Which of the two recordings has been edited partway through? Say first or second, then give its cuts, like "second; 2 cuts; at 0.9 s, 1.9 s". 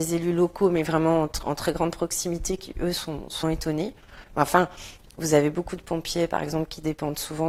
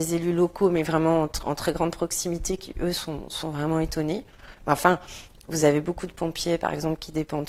first; 1 cut; at 3.4 s